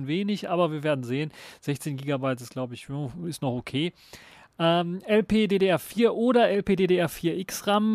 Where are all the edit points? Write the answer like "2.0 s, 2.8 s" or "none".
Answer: none